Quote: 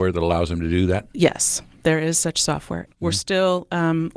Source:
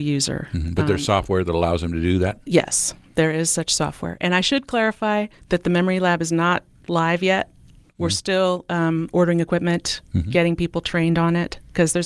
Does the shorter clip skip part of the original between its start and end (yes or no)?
yes